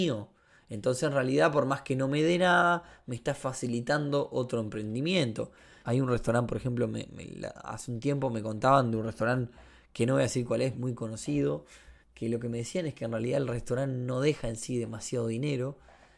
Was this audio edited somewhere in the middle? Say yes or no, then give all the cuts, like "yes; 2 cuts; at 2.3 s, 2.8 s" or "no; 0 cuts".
yes; 3 cuts; at 5.8 s, 10.7 s, 12.0 s